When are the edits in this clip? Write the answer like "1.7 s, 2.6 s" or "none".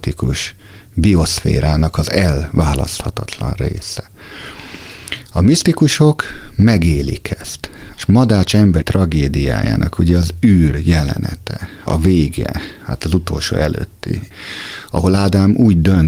7.9 s